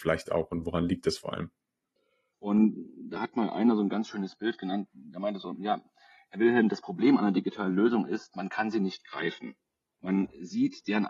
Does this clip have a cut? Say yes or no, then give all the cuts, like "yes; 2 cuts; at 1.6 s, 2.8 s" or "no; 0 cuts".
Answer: yes; 1 cut; at 2.3 s